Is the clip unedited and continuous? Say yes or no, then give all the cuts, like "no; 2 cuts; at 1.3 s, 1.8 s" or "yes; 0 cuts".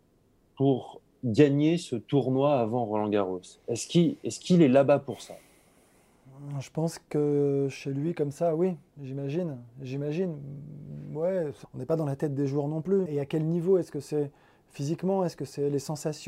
no; 2 cuts; at 11.6 s, 13.1 s